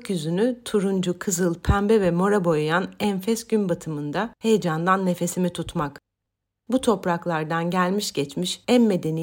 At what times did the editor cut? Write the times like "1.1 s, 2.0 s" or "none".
none

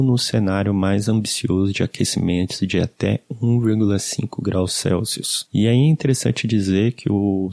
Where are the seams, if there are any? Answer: 5.5 s

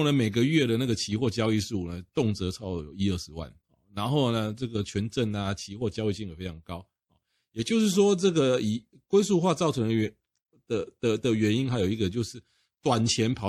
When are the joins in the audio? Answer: none

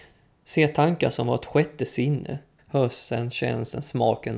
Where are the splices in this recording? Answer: 2.6 s

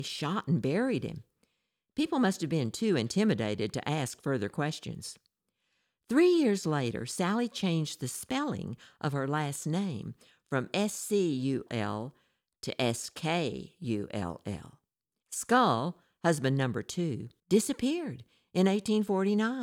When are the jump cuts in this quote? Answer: 11.7 s, 15.2 s, 17.4 s

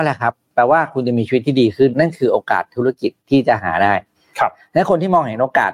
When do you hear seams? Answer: 1.9 s

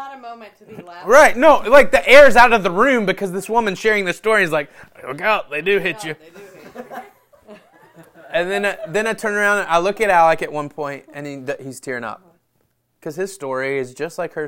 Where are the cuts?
12.9 s

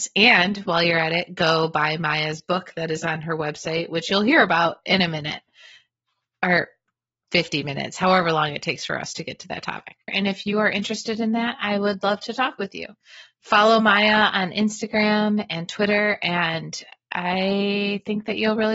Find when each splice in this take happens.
10.1 s

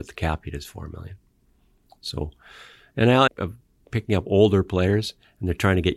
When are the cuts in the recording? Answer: 3.3 s

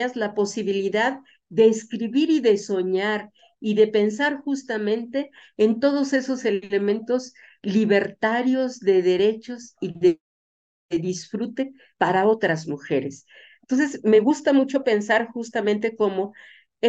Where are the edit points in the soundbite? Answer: none

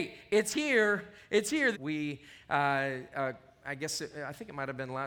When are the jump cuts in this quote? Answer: 1.7 s

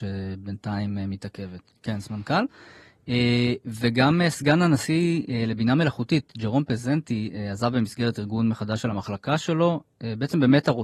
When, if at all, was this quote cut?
1.7 s

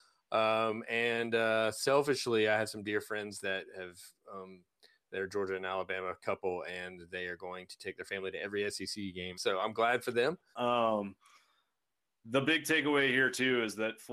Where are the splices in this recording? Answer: 9.3 s, 10.5 s

